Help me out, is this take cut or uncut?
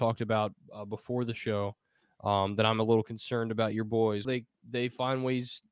cut